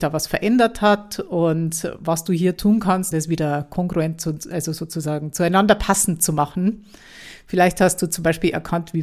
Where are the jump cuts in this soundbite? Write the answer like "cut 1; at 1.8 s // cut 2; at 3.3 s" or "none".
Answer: cut 1; at 3.1 s